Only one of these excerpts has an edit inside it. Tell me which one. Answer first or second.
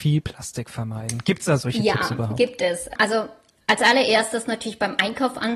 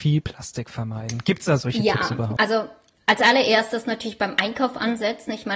second